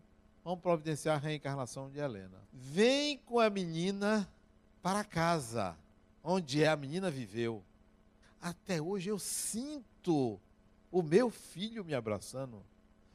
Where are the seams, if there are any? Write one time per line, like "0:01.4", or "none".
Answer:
0:02.4
0:08.2